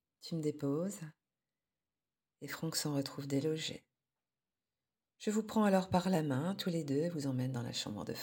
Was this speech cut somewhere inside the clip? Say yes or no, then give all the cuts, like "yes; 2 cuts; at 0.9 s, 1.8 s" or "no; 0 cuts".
no; 0 cuts